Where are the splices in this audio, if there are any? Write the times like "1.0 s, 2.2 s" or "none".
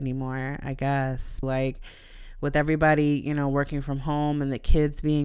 1.4 s